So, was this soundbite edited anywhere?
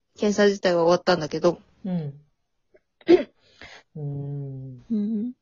yes; 1 cut; at 3.8 s

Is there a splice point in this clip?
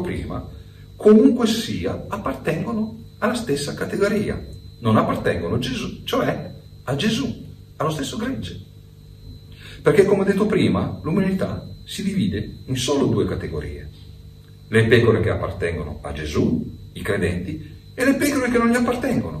no; 0 cuts

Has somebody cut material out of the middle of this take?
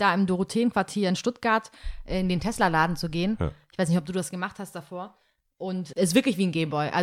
yes; 1 cut; at 5.9 s

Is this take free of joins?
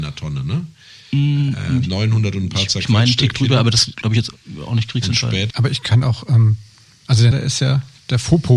no; 2 cuts; at 5.5 s, 7.3 s

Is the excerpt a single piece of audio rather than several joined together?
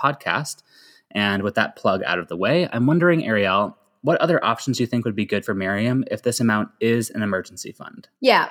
yes; 0 cuts

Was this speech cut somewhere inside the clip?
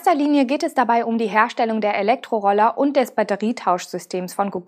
no; 0 cuts

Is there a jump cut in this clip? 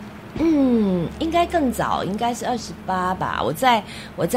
no; 0 cuts

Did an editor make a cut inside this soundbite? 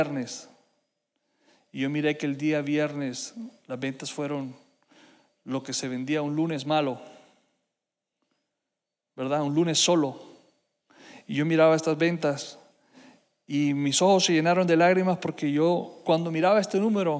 no; 0 cuts

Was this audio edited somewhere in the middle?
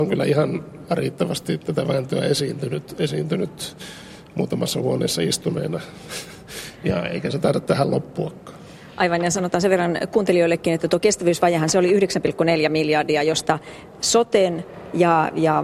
no; 0 cuts

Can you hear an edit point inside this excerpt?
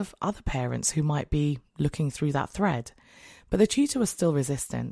no; 0 cuts

